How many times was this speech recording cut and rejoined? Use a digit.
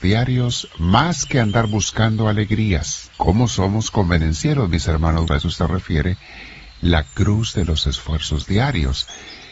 2